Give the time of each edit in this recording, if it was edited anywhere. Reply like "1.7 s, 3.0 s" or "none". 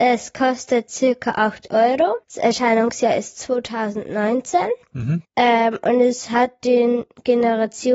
2.2 s, 5.2 s